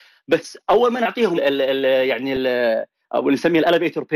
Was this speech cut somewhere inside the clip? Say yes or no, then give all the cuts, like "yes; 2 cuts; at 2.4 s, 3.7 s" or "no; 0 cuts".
yes; 1 cut; at 1.4 s